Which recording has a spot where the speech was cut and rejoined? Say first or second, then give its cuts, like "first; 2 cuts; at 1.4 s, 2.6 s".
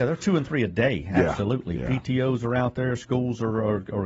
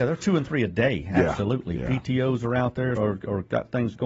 second; 1 cut; at 3.0 s